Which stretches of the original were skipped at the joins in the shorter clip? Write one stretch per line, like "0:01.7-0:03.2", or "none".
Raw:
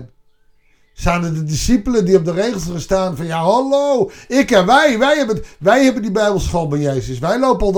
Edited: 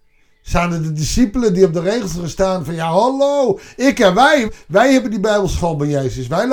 0:05.0-0:05.4